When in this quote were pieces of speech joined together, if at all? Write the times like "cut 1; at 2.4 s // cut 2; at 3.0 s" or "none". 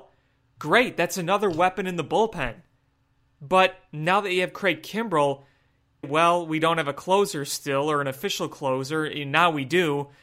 cut 1; at 6.0 s